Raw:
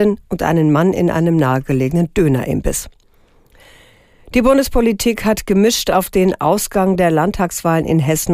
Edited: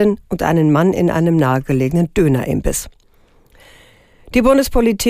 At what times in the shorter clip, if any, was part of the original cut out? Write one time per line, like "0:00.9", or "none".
none